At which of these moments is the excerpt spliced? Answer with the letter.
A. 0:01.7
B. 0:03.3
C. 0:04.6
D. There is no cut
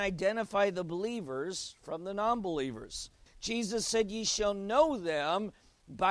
B